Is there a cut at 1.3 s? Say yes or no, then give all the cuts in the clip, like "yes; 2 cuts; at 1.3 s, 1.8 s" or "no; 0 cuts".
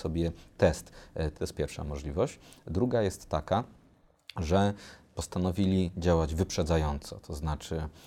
yes; 1 cut; at 1.3 s